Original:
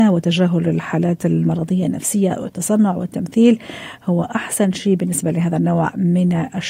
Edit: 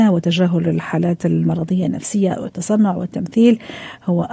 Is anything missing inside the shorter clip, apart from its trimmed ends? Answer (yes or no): no